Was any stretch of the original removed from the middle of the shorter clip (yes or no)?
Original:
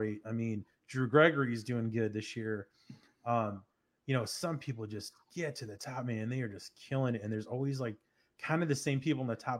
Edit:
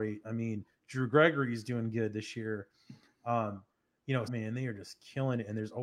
yes